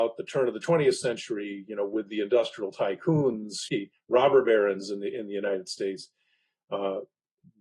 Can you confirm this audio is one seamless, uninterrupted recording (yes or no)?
no